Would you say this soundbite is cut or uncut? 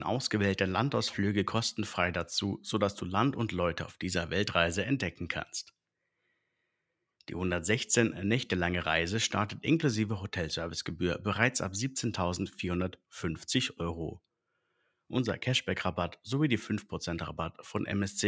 uncut